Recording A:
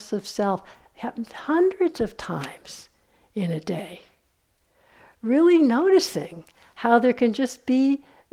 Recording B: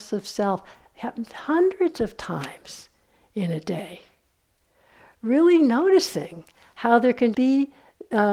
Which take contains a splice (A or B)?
B